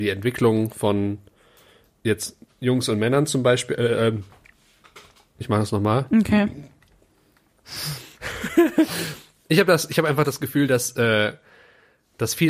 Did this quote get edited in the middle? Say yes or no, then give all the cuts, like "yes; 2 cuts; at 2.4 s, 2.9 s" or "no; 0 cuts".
yes; 1 cut; at 5.4 s